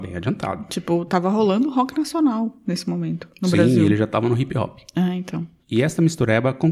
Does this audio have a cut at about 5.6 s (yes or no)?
yes